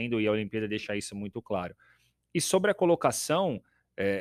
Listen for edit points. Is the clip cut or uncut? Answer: uncut